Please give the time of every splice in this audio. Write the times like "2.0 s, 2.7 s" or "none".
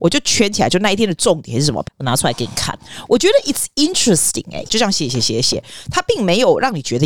1.8 s, 4.7 s